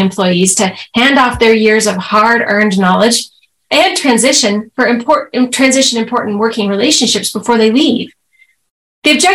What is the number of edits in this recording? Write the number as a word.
zero